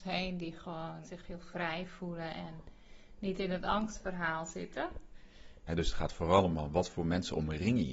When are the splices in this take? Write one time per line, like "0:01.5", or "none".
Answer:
0:01.0
0:05.7